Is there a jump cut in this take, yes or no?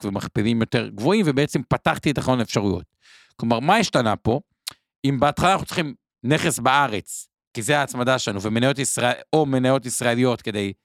no